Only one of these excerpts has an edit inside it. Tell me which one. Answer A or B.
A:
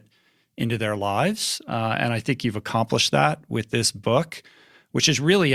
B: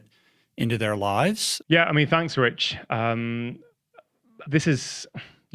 B